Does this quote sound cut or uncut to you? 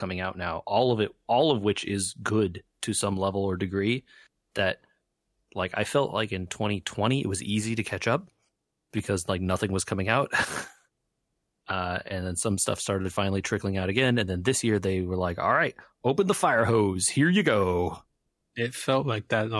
uncut